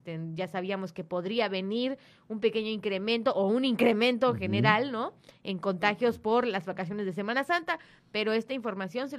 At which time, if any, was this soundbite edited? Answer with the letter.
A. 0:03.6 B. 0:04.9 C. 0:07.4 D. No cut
D